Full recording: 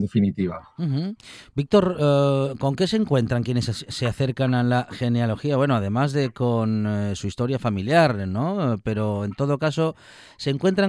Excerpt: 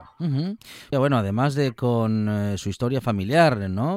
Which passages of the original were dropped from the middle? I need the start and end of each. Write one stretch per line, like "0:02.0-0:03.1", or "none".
0:01.5-0:05.5